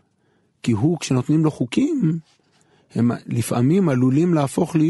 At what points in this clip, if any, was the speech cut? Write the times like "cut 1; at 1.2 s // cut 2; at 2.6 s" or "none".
none